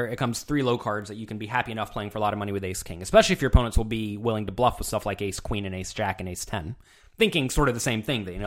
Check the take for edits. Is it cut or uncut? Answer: uncut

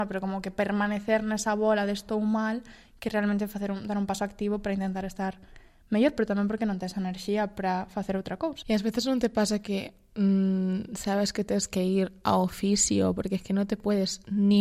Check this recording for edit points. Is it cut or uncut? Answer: uncut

